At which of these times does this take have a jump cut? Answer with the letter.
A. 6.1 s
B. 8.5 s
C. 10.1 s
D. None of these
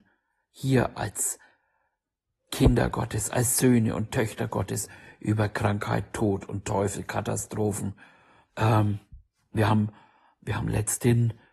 B